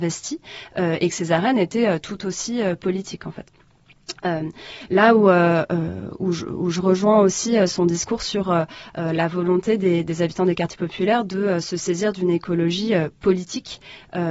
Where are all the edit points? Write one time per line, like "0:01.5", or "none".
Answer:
none

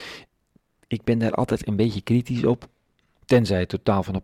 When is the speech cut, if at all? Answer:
0:03.2

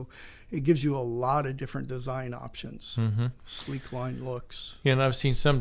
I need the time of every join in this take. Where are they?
none

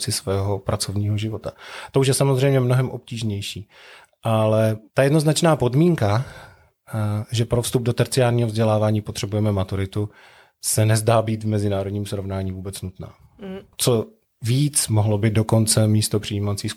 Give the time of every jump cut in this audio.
0:13.7

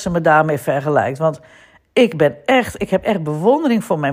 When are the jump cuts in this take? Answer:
none

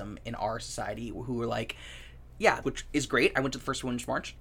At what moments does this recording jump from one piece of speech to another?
0:02.6

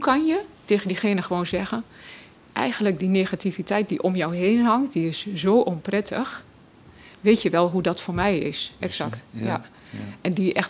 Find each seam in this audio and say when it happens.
0:08.8

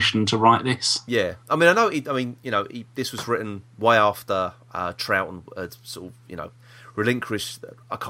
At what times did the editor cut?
none

